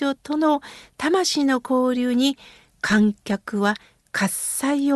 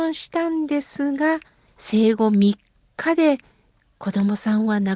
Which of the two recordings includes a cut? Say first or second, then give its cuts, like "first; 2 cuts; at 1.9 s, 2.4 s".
second; 1 cut; at 1.7 s